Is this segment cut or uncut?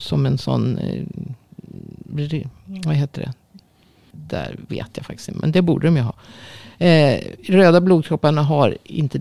cut